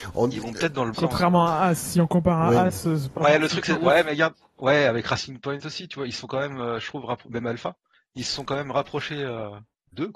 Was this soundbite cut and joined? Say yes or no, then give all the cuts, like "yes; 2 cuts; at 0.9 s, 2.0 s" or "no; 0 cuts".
yes; 1 cut; at 0.9 s